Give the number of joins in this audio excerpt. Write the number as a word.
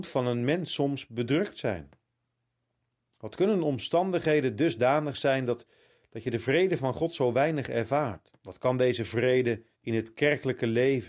two